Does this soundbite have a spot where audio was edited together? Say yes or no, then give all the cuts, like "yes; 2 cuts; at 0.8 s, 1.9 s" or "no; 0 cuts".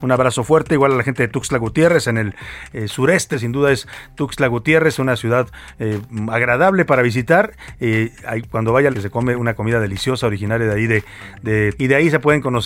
yes; 3 cuts; at 3.3 s, 8.9 s, 11.7 s